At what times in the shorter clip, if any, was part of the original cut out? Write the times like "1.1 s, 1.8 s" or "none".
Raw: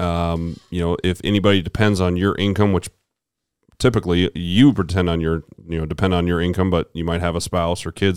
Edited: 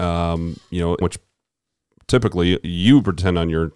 1.0 s